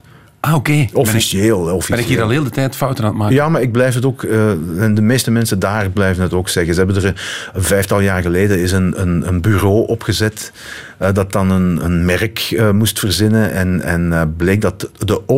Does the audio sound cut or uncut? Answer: cut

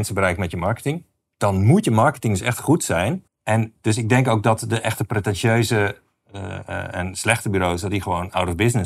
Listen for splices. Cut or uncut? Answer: cut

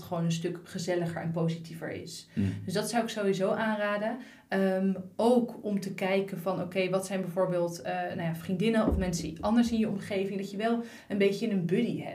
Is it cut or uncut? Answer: uncut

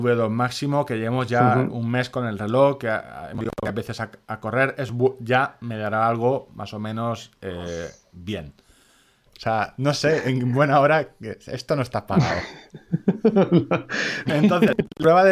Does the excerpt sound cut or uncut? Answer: cut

